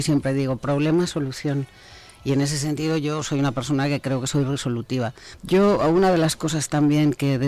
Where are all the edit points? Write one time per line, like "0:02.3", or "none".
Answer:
0:05.4